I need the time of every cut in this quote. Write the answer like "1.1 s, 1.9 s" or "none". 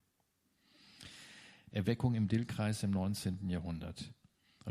1.7 s